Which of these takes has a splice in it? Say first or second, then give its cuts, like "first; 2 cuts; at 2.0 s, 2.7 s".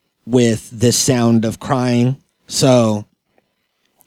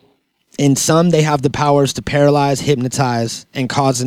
first; 1 cut; at 2.4 s